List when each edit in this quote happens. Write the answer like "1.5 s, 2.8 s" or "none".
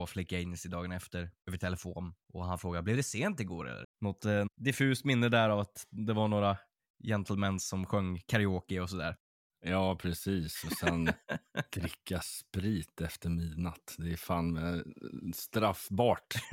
3.8 s